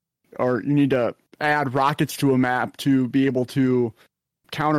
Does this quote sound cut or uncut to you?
uncut